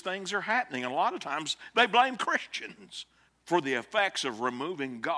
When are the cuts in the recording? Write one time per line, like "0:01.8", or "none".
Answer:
0:03.3